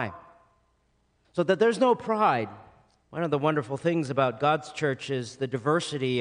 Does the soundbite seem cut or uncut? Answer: cut